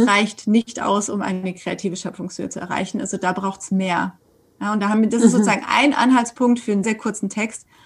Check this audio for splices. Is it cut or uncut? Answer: cut